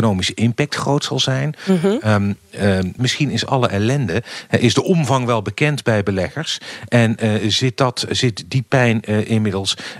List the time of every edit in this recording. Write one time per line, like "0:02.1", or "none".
0:03.0